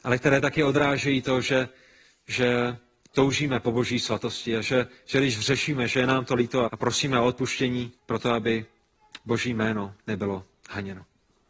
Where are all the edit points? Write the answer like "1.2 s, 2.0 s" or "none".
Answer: 6.7 s, 8.0 s